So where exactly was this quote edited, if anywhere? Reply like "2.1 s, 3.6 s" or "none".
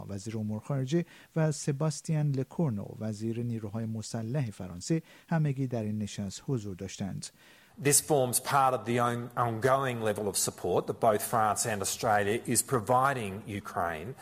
7.7 s